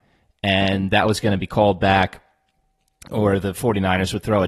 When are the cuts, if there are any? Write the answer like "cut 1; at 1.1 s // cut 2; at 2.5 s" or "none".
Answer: none